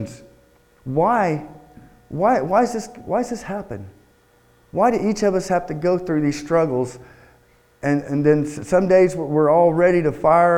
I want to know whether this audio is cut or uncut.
uncut